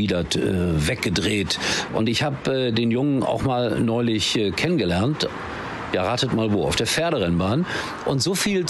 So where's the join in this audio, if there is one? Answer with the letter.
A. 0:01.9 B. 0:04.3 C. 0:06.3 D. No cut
A